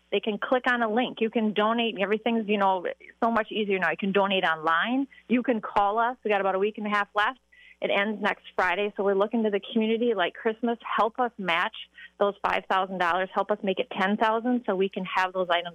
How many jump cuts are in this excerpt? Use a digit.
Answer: 1